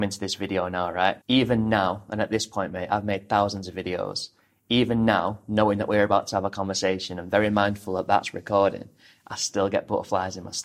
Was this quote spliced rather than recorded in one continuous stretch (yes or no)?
yes